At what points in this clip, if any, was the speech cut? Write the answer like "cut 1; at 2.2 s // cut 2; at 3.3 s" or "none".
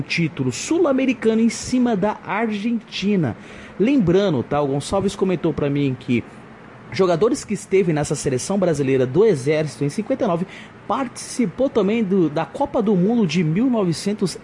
none